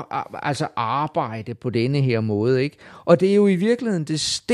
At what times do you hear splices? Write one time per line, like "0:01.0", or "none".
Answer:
none